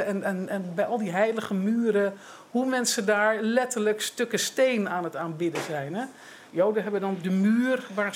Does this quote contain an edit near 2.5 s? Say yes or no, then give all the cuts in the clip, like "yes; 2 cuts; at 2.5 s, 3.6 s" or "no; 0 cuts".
no; 1 cut; at 7.2 s